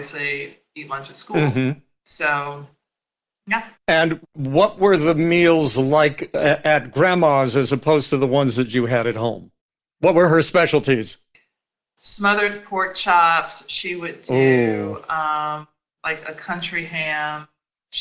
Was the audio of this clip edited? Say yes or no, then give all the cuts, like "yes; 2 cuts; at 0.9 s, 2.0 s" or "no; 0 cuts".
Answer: yes; 1 cut; at 3.8 s